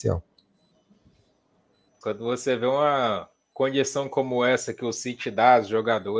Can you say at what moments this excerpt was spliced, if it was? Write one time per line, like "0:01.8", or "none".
0:02.0